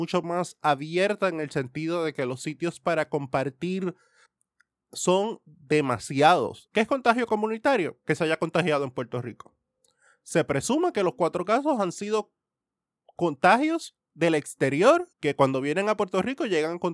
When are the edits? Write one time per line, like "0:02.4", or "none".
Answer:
0:06.7
0:15.1